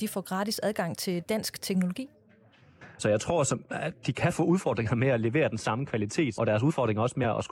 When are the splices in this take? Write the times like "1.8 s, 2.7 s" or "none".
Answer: 3.0 s, 6.3 s